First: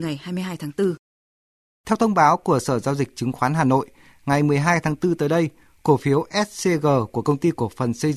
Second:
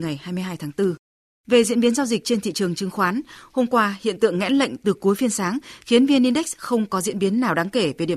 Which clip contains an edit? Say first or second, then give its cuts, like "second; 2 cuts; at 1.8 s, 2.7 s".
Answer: second; 1 cut; at 1.4 s